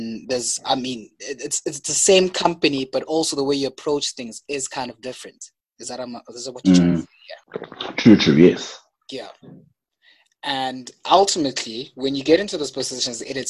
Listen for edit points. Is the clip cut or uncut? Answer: cut